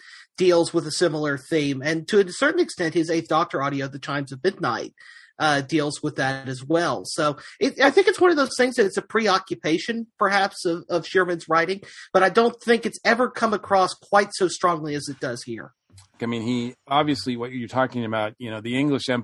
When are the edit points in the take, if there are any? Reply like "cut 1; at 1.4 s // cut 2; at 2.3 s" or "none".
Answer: cut 1; at 16.2 s